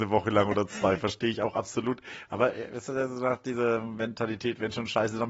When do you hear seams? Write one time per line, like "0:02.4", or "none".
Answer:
none